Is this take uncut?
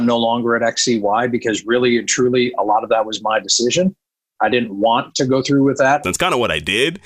no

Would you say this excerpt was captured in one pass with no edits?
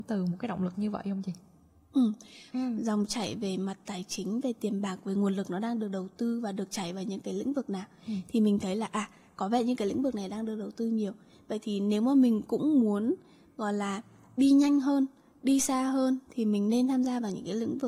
no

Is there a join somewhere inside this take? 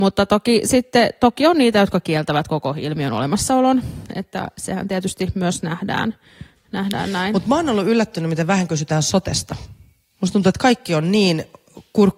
no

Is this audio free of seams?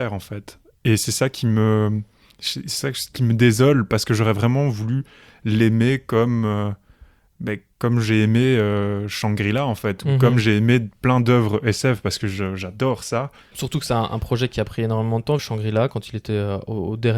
no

